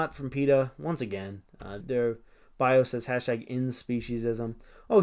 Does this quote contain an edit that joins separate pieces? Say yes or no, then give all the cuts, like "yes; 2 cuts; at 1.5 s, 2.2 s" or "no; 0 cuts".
yes; 1 cut; at 1.8 s